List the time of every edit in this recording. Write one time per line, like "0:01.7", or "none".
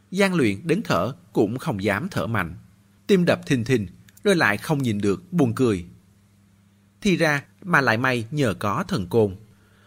0:03.0
0:07.5